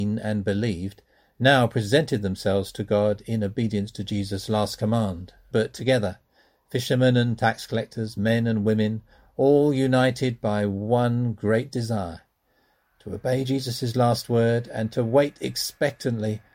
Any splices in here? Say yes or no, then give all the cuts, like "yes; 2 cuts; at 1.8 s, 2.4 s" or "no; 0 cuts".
yes; 1 cut; at 5.5 s